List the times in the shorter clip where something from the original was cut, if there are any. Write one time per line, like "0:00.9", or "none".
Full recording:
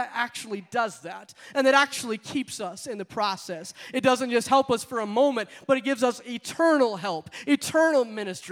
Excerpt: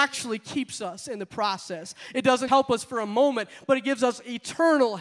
0:02.5